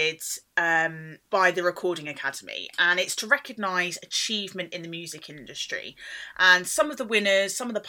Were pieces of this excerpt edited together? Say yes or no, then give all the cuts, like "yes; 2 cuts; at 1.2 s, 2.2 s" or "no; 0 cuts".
yes; 1 cut; at 1.3 s